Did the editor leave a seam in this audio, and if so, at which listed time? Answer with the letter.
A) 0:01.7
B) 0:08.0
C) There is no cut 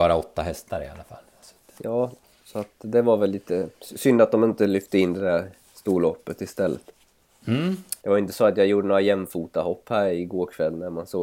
B